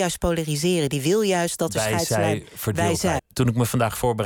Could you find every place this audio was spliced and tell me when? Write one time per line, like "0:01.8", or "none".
0:03.2